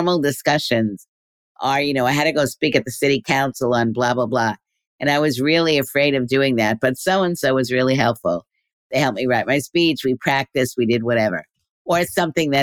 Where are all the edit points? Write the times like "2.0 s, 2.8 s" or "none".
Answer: none